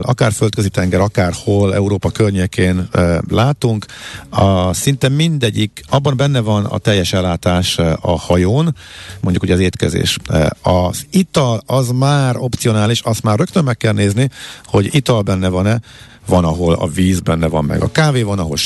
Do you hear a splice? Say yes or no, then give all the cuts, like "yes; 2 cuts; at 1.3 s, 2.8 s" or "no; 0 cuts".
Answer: yes; 1 cut; at 9.2 s